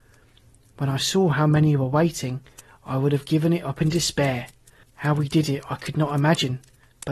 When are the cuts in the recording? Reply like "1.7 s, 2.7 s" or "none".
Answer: 4.8 s